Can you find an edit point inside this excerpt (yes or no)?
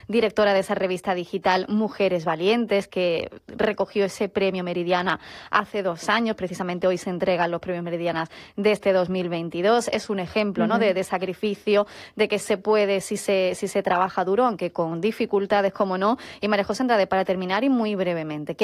no